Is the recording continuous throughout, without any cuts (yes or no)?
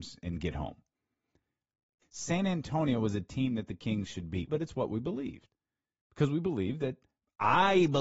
no